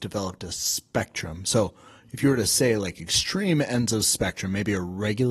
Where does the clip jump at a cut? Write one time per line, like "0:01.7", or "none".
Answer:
none